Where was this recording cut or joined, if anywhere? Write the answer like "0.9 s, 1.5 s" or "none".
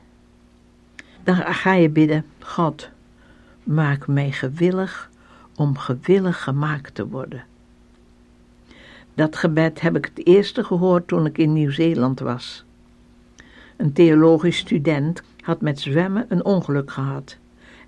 1.2 s, 15.2 s